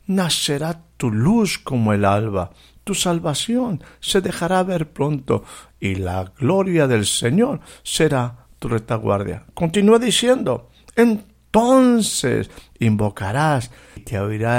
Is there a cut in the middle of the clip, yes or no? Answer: yes